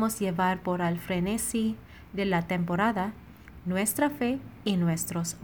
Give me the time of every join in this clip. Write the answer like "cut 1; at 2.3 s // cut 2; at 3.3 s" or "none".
cut 1; at 3.6 s